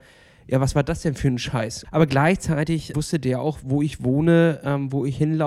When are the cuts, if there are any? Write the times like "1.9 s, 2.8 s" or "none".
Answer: 1.8 s, 2.9 s